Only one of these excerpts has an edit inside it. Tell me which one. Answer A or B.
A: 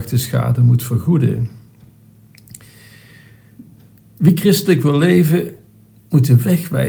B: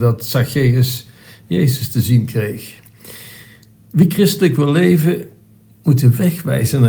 A